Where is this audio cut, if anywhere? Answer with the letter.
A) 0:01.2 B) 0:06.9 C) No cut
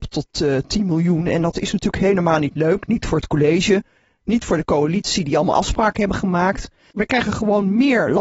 B